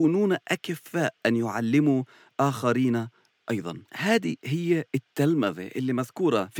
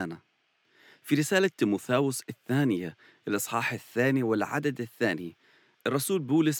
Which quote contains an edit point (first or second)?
first